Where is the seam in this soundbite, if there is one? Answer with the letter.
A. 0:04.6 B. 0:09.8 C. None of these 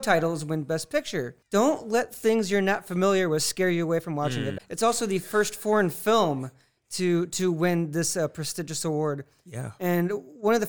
A